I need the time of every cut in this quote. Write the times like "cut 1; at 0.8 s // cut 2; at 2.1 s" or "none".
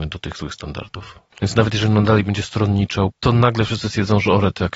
cut 1; at 1.3 s // cut 2; at 3.1 s